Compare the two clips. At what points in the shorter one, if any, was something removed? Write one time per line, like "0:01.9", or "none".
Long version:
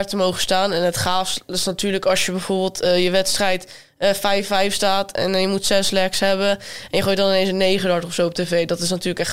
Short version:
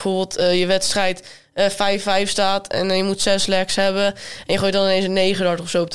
none